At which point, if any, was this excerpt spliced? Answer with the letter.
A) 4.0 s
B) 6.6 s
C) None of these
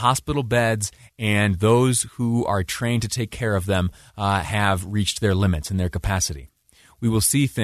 C